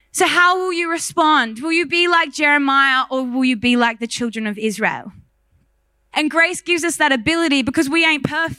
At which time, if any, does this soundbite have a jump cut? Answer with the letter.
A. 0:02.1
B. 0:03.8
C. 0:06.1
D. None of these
C